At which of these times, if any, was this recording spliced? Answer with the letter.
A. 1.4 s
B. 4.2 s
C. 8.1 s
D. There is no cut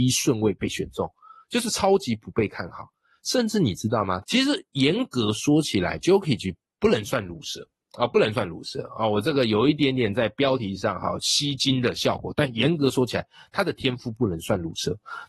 B